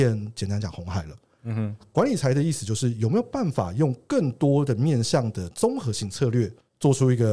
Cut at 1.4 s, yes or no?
yes